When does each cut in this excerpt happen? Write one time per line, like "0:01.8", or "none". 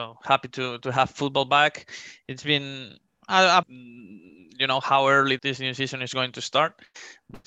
0:03.6
0:05.4